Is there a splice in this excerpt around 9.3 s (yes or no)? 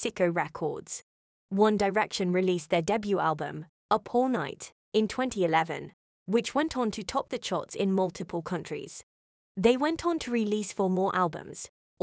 no